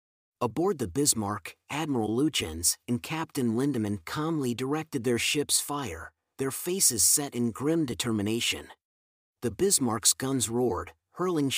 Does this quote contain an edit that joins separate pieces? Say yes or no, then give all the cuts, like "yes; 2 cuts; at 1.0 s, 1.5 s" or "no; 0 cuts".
yes; 1 cut; at 9.3 s